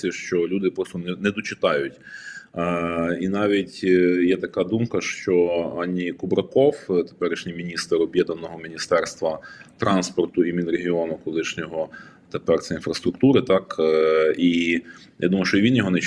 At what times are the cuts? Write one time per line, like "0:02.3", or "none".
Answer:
none